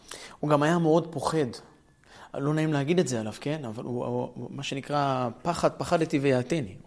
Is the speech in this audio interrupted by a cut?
no; 0 cuts

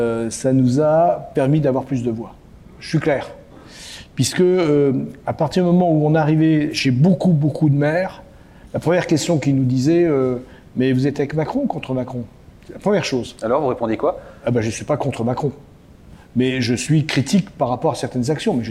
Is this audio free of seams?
yes; 0 cuts

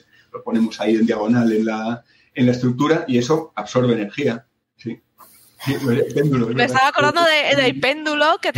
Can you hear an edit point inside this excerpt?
no; 0 cuts

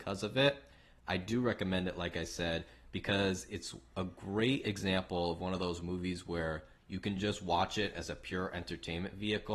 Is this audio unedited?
yes; 0 cuts

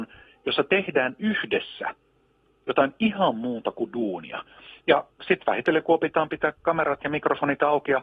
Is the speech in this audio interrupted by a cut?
no; 0 cuts

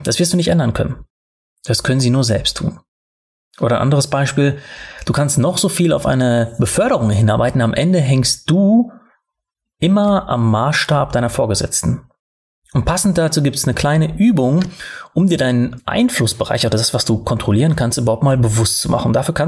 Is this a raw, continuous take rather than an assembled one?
no; 1 cut; at 12.5 s

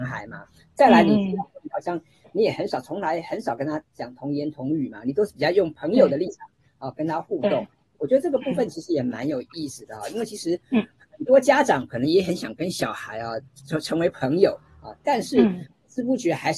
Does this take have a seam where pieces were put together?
no; 0 cuts

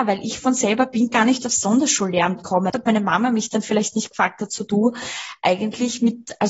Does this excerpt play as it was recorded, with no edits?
no; 1 cut; at 2.7 s

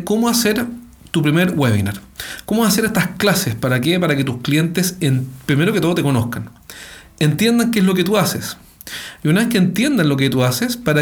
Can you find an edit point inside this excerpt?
no; 0 cuts

